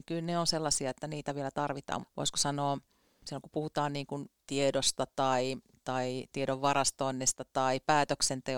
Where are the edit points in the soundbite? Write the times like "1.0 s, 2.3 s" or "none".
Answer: 2.0 s, 4.4 s